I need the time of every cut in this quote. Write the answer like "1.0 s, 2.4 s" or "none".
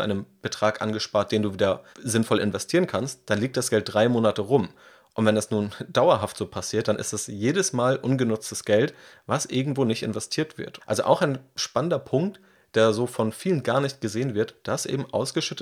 1.9 s, 10.8 s

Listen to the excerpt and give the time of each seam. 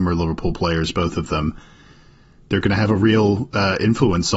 none

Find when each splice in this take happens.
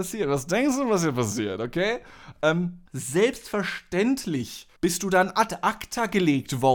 2.9 s, 4.8 s

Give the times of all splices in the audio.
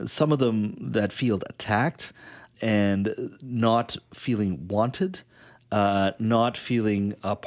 2.5 s

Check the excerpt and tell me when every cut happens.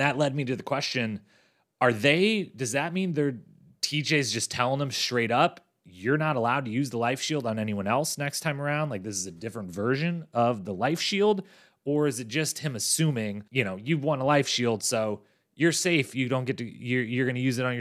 13.5 s

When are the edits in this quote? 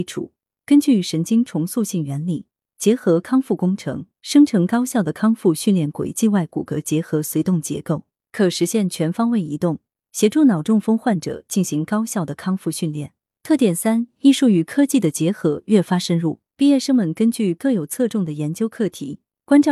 13.2 s, 16.5 s

